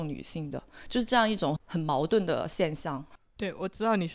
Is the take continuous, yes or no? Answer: no